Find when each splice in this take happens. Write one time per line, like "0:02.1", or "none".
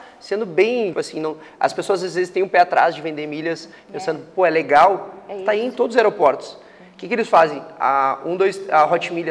0:00.9

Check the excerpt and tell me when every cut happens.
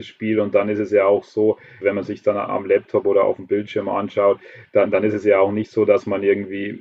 0:01.8

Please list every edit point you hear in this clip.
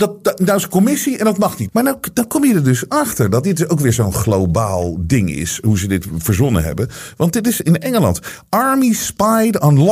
0:01.7

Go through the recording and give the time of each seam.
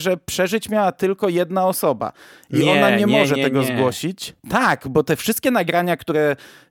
none

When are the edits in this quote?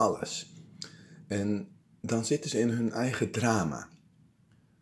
none

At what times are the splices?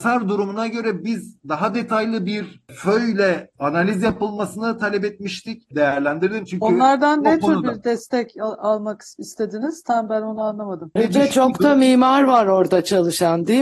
0:05.7
0:11.0

